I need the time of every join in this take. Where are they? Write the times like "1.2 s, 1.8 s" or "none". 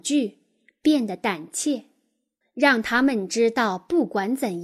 2.4 s